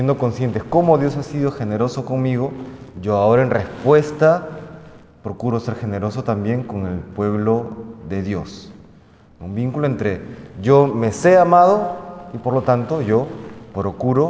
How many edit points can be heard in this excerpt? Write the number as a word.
zero